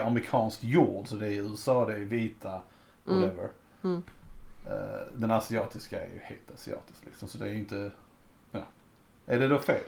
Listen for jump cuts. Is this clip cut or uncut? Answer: uncut